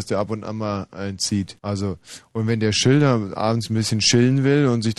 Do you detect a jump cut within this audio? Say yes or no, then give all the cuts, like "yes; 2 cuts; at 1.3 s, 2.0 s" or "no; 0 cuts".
yes; 1 cut; at 1.6 s